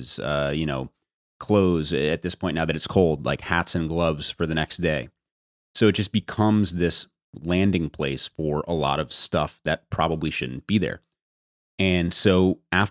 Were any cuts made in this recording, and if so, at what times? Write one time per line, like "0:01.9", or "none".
none